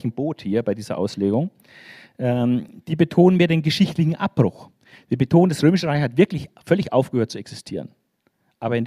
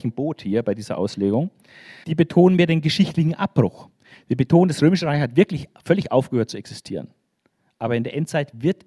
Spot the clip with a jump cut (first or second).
second